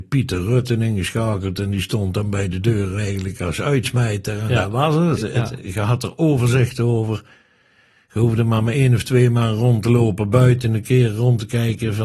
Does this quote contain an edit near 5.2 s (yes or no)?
yes